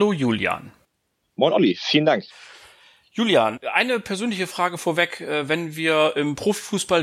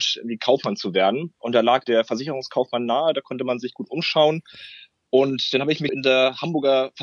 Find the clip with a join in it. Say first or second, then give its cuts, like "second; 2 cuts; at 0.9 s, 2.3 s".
second; 2 cuts; at 1.8 s, 5.9 s